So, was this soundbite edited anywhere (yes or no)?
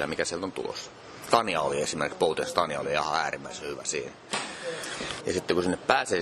yes